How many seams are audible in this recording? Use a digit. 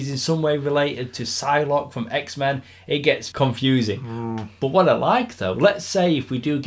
1